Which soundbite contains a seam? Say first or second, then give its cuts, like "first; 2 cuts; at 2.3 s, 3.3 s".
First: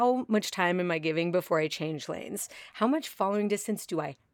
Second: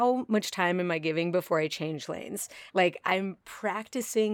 second; 1 cut; at 2.7 s